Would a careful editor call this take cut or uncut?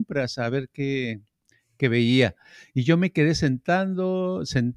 uncut